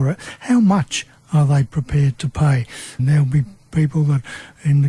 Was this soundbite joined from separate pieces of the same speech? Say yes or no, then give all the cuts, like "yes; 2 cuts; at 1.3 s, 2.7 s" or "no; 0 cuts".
yes; 1 cut; at 3.0 s